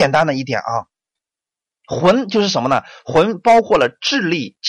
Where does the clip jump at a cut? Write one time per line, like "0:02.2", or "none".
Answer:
none